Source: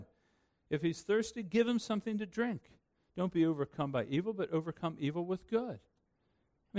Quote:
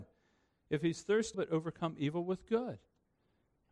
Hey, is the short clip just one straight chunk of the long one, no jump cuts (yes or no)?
no